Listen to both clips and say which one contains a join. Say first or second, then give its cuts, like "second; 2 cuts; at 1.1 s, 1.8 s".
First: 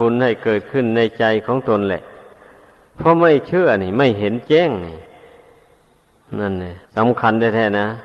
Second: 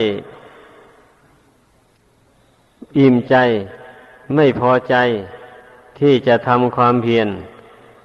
first; 1 cut; at 6.9 s